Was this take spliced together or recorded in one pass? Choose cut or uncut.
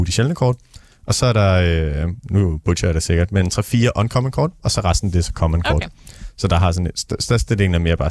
cut